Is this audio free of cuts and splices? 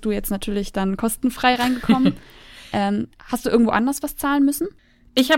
yes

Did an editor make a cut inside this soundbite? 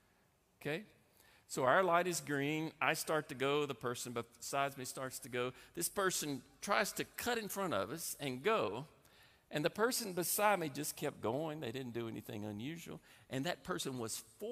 no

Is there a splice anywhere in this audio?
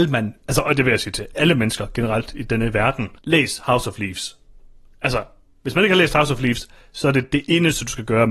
yes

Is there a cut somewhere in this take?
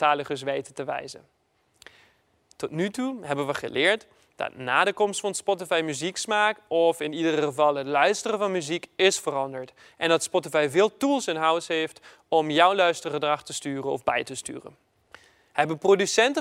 no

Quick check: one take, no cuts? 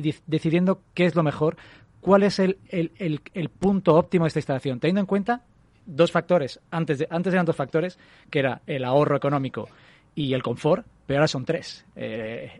yes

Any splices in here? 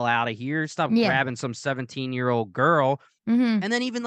no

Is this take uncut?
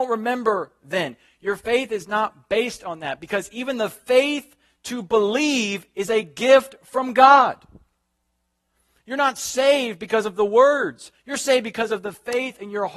yes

